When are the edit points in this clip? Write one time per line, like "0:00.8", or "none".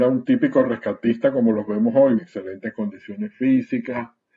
0:02.2